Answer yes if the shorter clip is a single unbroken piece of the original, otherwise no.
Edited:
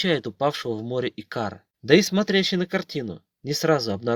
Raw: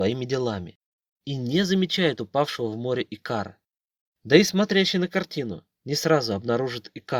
no